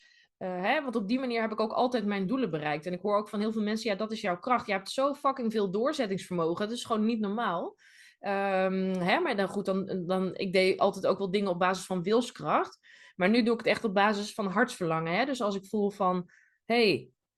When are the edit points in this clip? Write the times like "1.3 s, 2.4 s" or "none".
none